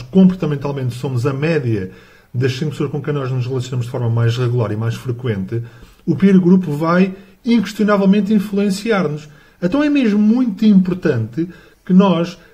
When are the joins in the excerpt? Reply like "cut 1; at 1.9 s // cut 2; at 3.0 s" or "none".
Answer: none